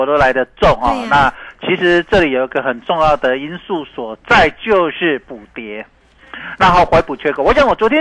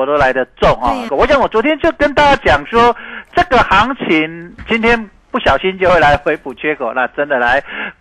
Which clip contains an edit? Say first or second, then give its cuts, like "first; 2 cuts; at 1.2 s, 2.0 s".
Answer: second; 1 cut; at 1.1 s